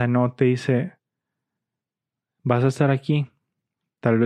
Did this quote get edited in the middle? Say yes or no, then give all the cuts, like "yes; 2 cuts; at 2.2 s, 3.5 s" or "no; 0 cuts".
no; 0 cuts